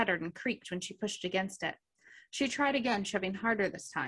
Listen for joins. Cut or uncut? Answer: uncut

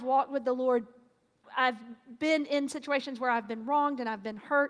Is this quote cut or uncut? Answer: cut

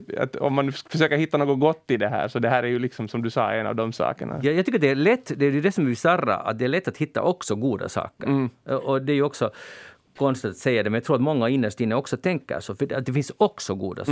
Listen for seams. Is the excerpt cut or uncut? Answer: uncut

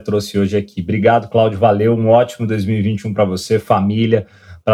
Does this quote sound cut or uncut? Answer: uncut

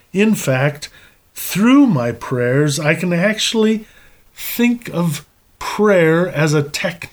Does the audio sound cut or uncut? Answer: uncut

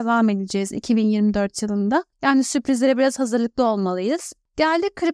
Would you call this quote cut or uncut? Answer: uncut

